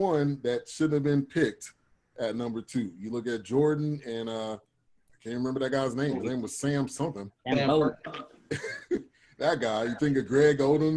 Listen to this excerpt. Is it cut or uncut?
uncut